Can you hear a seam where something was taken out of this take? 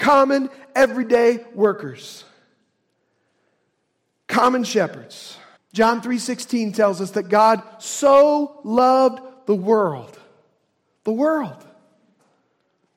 yes; 1 cut; at 5.6 s

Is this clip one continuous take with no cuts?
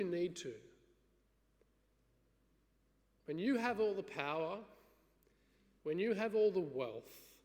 no; 1 cut; at 5.8 s

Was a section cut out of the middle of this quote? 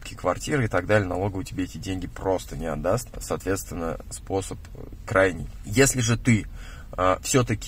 no; 0 cuts

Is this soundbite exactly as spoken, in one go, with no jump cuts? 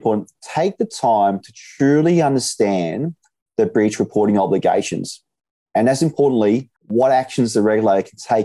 no; 1 cut; at 6.8 s

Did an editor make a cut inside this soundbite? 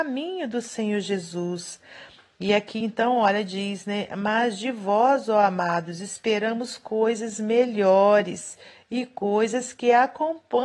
no; 0 cuts

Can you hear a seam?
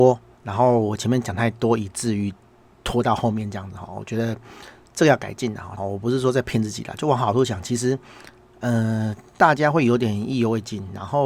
yes; 1 cut; at 5.8 s

